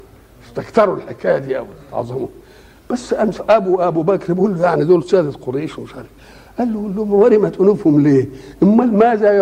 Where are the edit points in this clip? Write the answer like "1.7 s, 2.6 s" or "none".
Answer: 3.4 s